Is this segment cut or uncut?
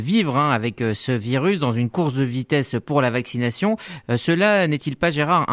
uncut